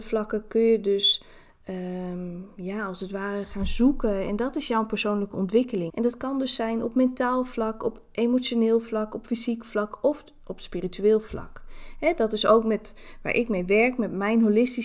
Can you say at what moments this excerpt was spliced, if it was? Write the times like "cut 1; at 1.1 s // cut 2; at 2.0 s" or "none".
cut 1; at 5.9 s